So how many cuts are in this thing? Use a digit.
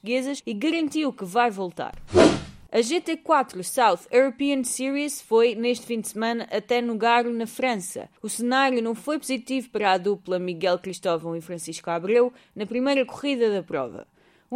1